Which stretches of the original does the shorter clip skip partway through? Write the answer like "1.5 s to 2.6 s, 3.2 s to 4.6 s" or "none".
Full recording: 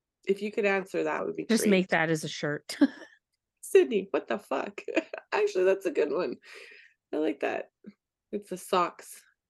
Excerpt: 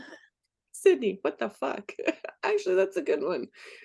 none